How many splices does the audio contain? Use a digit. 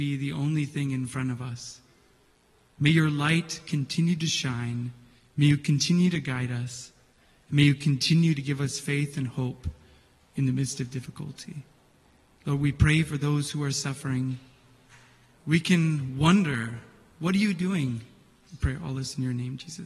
2